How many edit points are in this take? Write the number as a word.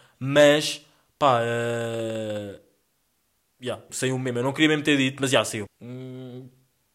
two